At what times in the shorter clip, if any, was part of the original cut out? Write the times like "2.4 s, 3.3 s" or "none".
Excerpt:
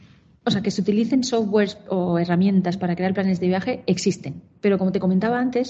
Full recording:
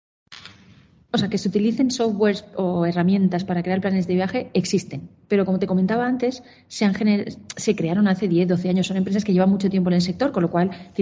none